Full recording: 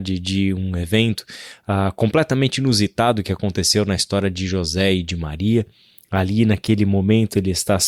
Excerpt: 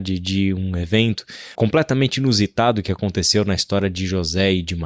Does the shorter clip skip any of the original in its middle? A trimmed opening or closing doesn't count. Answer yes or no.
yes